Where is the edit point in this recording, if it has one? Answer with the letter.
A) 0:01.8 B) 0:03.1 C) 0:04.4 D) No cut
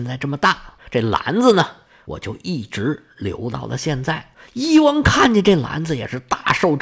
D